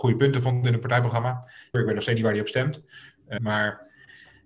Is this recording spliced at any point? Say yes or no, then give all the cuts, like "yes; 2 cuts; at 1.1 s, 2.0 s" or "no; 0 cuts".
yes; 2 cuts; at 1.7 s, 3.4 s